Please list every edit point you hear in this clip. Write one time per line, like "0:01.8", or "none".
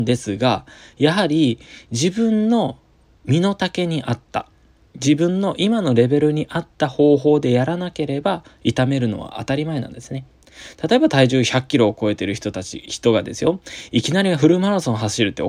none